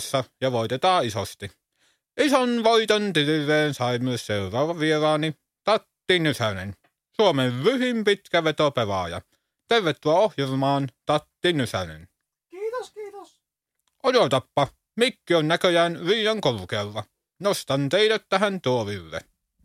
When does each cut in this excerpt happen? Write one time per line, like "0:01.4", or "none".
none

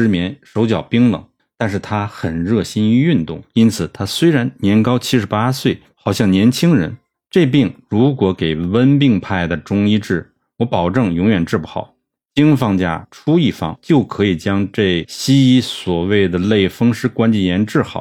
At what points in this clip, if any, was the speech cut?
0:05.9

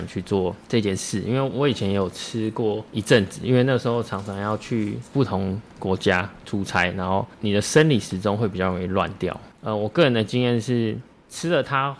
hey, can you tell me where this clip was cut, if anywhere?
none

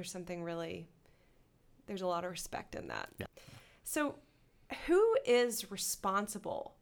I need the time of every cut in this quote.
0:03.3

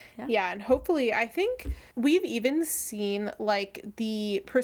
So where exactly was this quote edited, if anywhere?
0:01.9

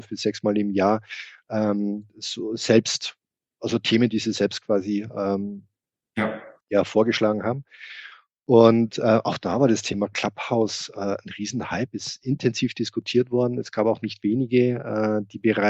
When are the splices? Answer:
none

